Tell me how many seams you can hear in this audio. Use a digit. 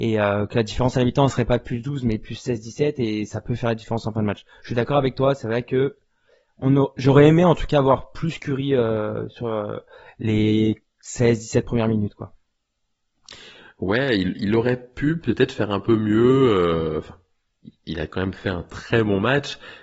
0